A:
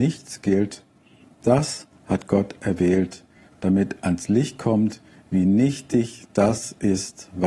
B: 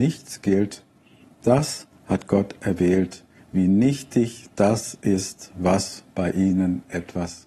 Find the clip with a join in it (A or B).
B